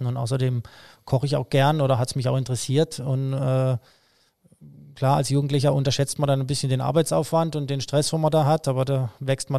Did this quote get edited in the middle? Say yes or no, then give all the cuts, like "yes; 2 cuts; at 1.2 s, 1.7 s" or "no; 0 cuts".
no; 0 cuts